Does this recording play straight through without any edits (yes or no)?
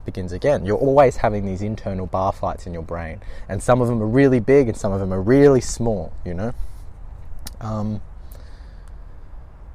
yes